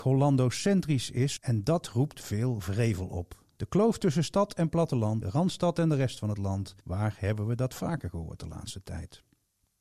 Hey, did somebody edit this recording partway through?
yes; 3 cuts; at 1.4 s, 5.2 s, 6.8 s

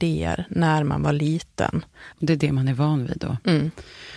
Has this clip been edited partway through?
yes; 1 cut; at 2.1 s

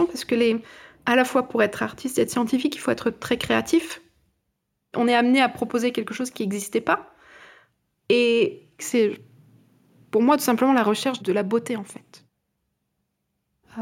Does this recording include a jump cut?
no; 0 cuts

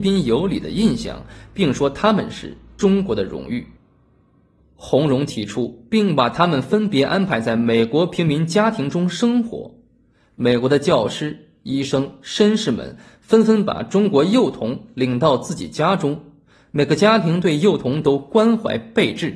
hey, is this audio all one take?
yes; 0 cuts

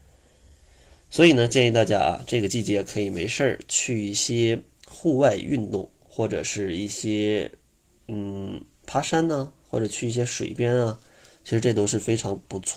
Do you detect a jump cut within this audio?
no; 0 cuts

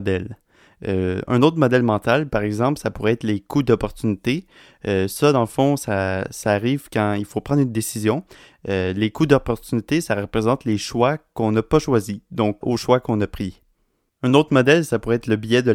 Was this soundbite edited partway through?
yes; 1 cut; at 12.6 s

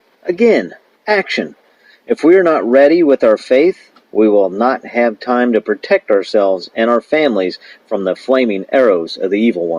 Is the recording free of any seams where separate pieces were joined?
yes; 0 cuts

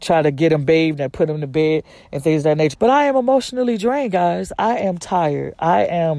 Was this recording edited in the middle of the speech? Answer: yes; 1 cut; at 2.7 s

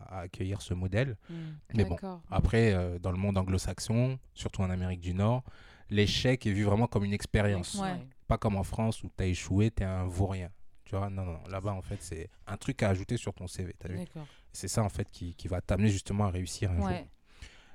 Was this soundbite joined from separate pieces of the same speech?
yes; 2 cuts; at 1.6 s, 8.2 s

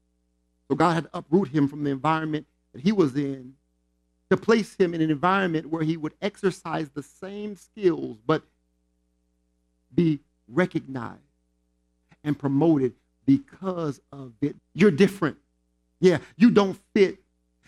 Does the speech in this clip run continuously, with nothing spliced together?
no; 1 cut; at 14.6 s

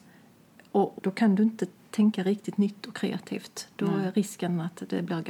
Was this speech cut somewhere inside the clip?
yes; 1 cut; at 1.0 s

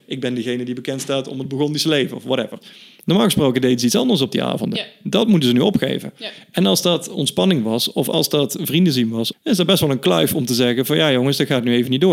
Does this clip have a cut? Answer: yes; 2 cuts; at 2.6 s, 9.3 s

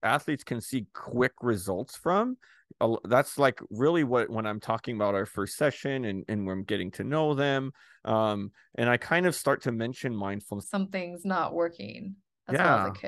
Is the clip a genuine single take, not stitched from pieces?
no; 1 cut; at 10.6 s

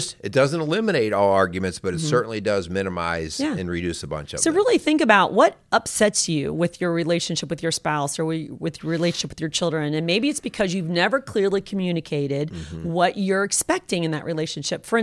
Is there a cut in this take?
no; 0 cuts

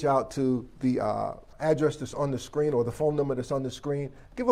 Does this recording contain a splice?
yes; 1 cut; at 1.5 s

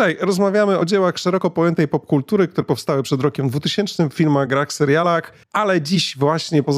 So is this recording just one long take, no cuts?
no; 1 cut; at 5.4 s

